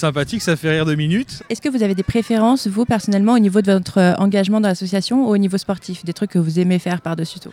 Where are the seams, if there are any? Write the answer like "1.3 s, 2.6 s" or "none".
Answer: 1.4 s